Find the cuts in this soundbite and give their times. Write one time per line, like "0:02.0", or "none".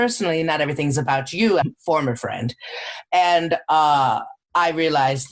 0:01.6